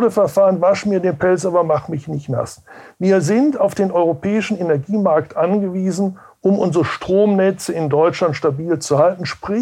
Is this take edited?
no; 0 cuts

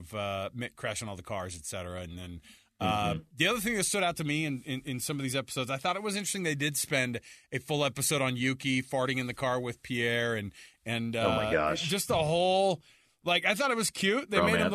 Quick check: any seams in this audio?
no; 0 cuts

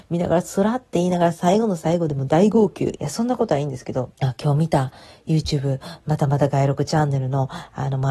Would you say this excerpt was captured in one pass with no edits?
no; 2 cuts; at 3.0 s, 4.1 s

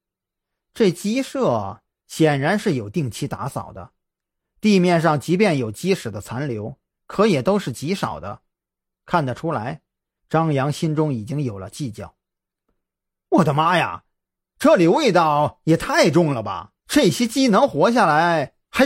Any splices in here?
yes; 2 cuts; at 10.2 s, 16.8 s

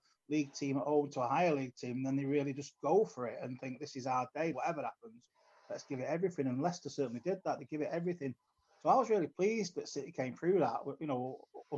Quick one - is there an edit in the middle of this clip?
yes; 1 cut; at 4.5 s

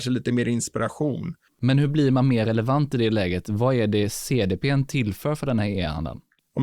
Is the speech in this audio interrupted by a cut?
yes; 1 cut; at 1.5 s

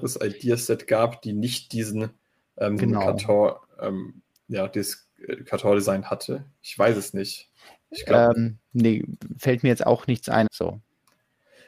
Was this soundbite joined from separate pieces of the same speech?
yes; 3 cuts; at 2.8 s, 8.3 s, 10.5 s

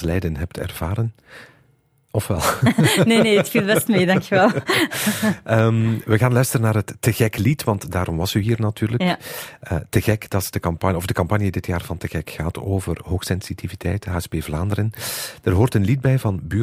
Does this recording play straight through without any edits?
yes; 0 cuts

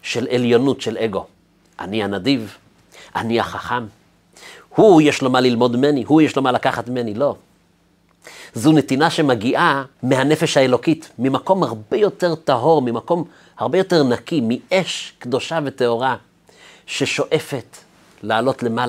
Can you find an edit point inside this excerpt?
yes; 1 cut; at 9.9 s

